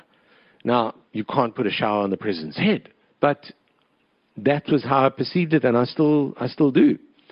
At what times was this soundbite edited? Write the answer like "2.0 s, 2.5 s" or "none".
1.1 s, 3.1 s